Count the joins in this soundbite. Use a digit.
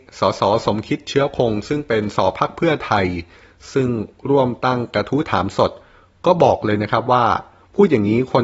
1